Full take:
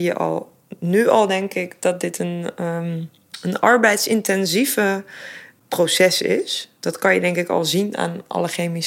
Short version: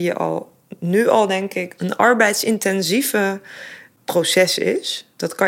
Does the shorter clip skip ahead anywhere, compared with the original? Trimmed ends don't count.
yes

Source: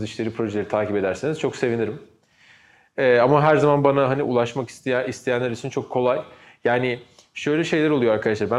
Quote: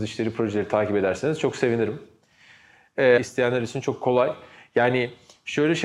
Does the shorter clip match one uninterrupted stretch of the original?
no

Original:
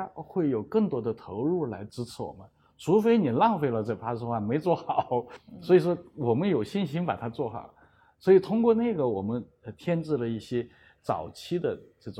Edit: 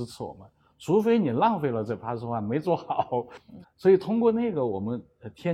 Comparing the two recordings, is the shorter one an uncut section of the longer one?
no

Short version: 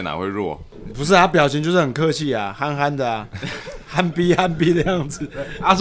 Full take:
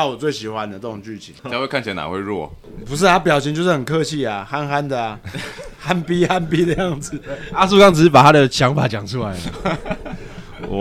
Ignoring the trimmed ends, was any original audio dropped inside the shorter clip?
no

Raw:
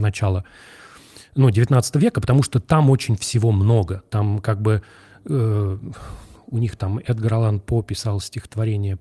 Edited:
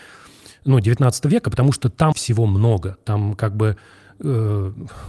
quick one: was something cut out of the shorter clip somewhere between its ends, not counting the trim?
yes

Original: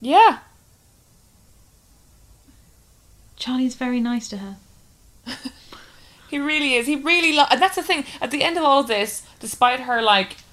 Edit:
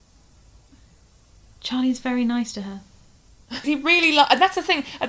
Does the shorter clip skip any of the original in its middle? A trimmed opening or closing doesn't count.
yes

